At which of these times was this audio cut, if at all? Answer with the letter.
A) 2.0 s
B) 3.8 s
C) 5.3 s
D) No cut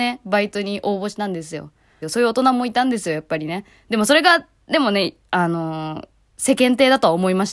A